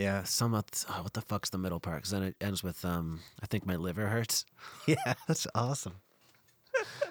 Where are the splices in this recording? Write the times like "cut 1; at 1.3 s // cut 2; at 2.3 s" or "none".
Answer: cut 1; at 5.2 s